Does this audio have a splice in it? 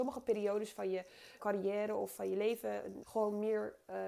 yes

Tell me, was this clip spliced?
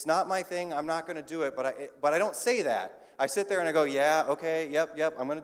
no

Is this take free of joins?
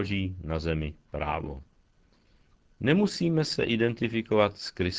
yes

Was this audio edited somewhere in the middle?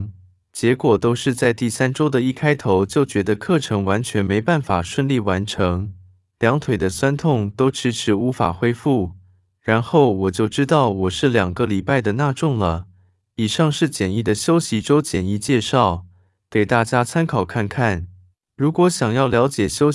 no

